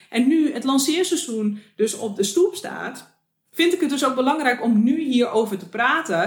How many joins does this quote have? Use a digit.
0